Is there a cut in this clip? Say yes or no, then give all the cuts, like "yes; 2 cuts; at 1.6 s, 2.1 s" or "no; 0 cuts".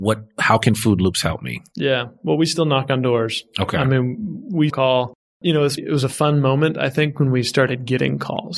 yes; 2 cuts; at 4.7 s, 5.8 s